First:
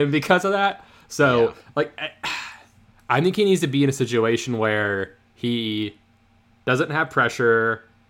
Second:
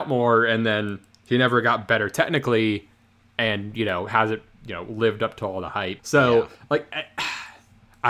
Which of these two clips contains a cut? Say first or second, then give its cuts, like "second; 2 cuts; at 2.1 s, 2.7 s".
second; 1 cut; at 6.0 s